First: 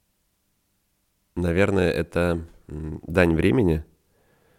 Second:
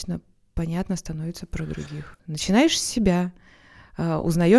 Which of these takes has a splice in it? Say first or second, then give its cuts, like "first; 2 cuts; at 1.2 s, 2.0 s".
second; 1 cut; at 2.2 s